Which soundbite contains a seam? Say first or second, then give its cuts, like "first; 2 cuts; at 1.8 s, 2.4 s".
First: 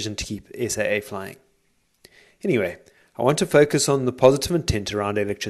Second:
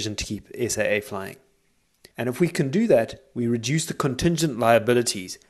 second; 1 cut; at 2.1 s